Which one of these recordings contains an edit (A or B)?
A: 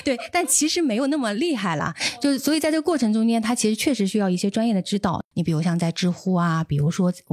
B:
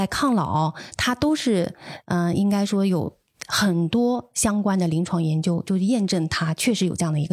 A